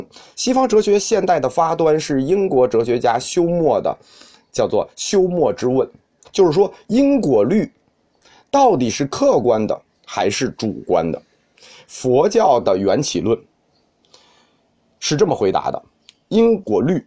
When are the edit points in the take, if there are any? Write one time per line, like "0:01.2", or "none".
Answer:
0:06.2

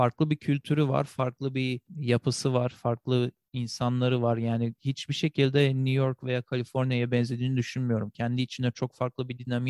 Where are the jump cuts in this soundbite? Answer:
none

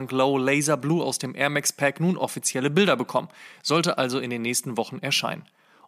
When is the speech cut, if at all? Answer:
none

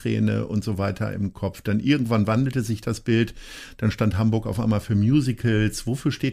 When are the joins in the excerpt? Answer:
none

